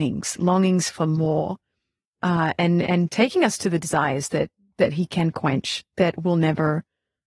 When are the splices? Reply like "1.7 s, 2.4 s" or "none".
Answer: none